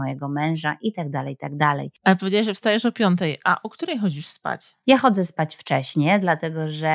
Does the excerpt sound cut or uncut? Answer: uncut